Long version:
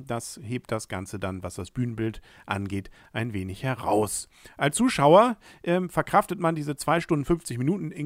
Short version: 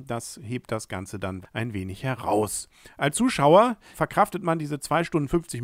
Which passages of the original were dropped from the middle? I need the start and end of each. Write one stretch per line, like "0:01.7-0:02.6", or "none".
0:01.4-0:03.0
0:05.5-0:05.9